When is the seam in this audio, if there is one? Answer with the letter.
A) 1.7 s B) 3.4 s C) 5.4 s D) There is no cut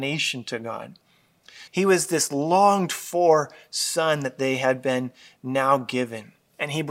A